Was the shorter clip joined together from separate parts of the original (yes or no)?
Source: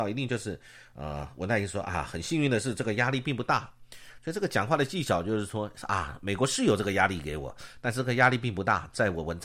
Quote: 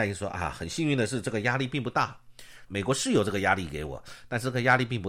yes